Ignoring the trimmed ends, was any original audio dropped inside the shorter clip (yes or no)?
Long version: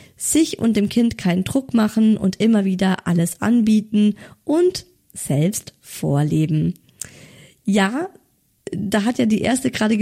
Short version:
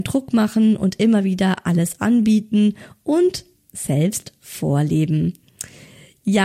no